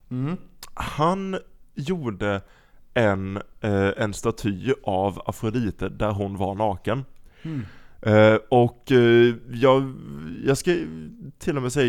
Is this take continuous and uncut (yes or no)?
yes